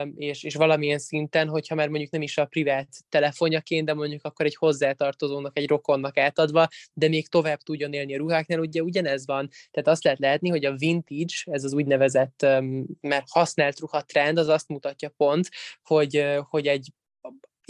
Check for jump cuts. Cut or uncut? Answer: uncut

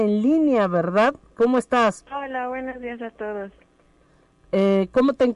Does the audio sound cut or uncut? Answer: cut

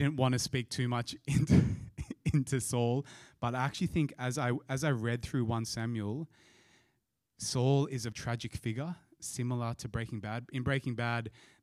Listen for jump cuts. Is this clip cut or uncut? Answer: cut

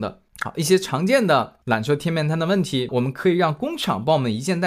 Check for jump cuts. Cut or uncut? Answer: cut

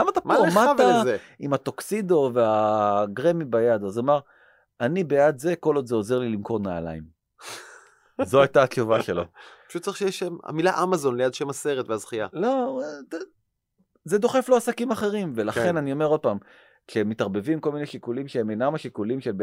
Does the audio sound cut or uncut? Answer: uncut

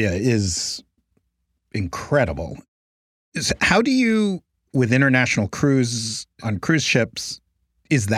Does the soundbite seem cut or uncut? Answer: uncut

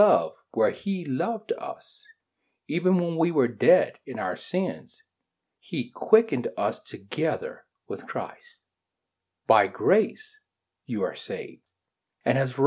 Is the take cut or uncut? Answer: uncut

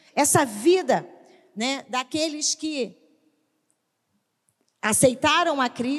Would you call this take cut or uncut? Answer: uncut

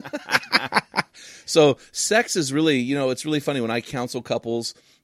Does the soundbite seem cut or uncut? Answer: uncut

